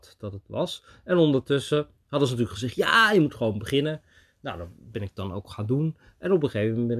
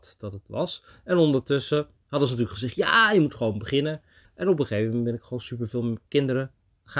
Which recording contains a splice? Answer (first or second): second